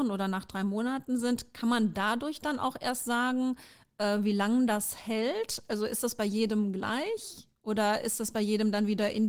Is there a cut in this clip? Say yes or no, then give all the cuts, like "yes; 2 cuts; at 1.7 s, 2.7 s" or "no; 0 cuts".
no; 0 cuts